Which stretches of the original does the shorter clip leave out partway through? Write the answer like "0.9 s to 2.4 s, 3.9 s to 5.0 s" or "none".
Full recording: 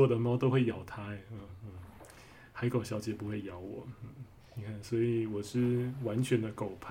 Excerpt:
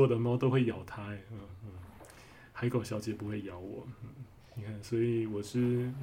none

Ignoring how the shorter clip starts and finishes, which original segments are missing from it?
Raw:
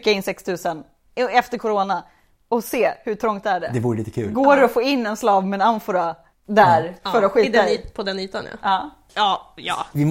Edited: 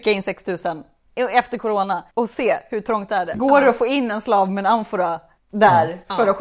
2.1 s to 2.5 s, 3.7 s to 4.3 s

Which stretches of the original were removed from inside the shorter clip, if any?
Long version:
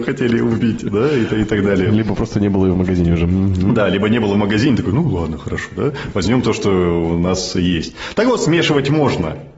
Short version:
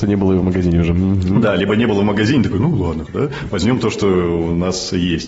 5.4 s to 5.7 s

